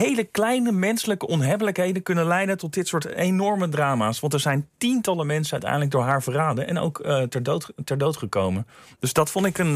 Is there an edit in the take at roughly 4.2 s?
no; 0 cuts

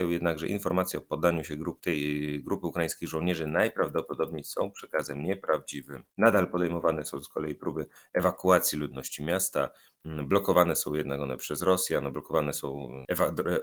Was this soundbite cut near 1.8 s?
yes; 1 cut; at 1.8 s

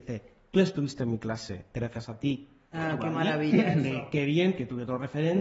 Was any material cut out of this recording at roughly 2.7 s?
yes; 1 cut; at 2.7 s

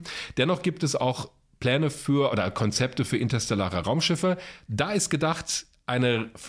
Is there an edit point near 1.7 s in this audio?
no; 1 cut; at 4.7 s

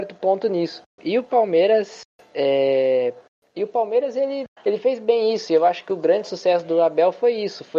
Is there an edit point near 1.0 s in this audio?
yes; 1 cut; at 1.0 s

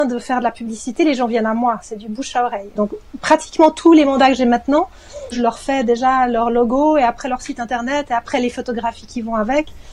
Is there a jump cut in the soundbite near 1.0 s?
no; 2 cuts; at 2.8 s, 5.3 s

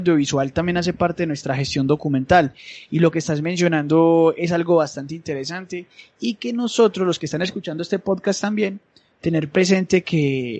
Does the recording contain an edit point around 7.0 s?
no; 1 cut; at 2.9 s

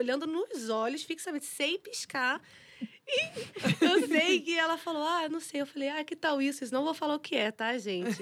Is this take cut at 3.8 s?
no; 0 cuts

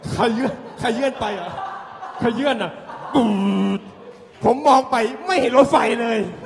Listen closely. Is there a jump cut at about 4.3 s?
yes; 1 cut; at 4.3 s

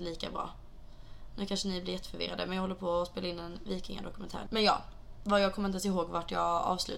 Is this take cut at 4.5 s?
yes; 1 cut; at 4.5 s

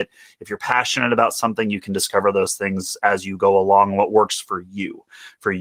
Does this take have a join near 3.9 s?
no; 0 cuts

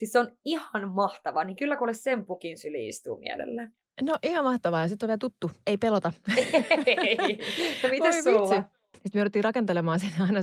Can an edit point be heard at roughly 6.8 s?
no; 1 cut; at 8.9 s

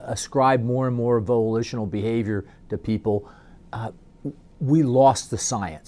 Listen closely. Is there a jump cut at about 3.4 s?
no; 0 cuts

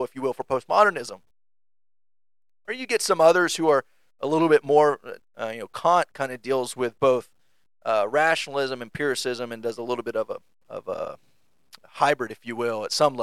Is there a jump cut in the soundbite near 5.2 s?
yes; 1 cut; at 5.2 s

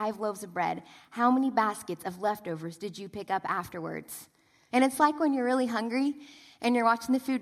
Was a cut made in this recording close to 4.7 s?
yes; 1 cut; at 4.7 s

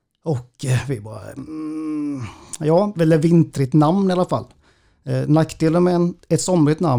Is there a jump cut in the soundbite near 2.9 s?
yes; 1 cut; at 2.9 s

